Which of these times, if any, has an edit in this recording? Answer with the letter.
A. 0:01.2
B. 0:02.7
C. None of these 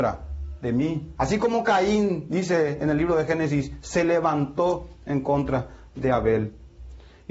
C